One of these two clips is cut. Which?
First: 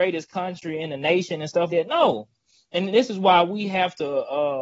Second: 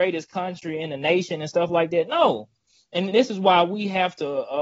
first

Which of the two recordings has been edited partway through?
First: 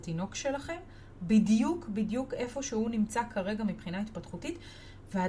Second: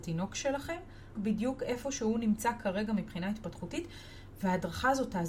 second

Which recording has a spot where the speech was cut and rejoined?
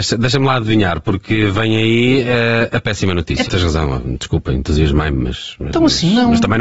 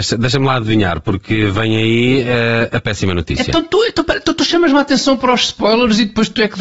first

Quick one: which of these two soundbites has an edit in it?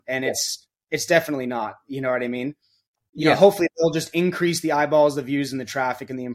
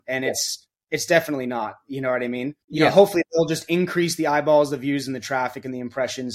second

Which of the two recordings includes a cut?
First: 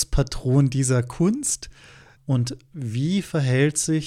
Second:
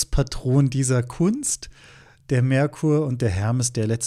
first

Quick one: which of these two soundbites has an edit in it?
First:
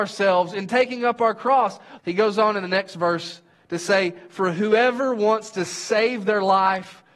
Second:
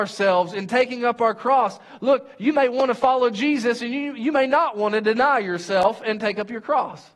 first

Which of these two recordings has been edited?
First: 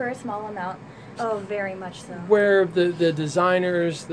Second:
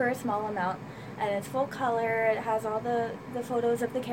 first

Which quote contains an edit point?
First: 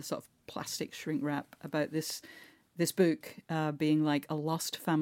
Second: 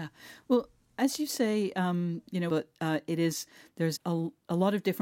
second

